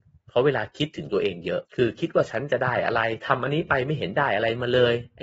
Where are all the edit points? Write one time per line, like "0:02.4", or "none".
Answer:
0:01.7